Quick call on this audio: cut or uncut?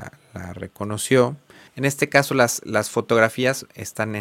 cut